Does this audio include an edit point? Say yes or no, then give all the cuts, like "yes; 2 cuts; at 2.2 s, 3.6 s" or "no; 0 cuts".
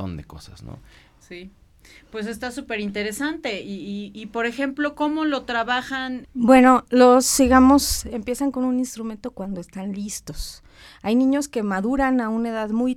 yes; 2 cuts; at 6.2 s, 7.4 s